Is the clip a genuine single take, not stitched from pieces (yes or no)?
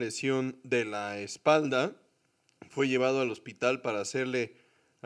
yes